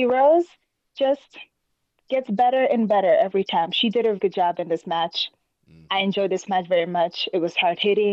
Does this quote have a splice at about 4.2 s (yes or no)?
yes